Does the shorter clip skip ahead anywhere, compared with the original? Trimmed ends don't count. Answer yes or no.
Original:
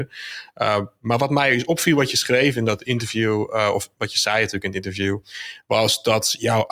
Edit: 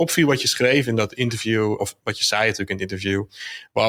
yes